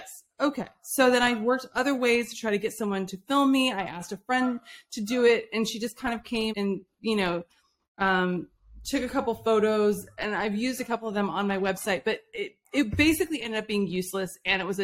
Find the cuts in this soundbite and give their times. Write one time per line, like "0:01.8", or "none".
0:06.5